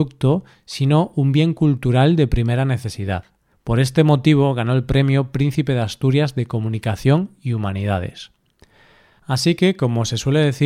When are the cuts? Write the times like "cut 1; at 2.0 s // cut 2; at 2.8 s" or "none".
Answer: cut 1; at 3.5 s